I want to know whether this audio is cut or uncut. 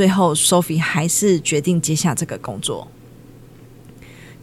uncut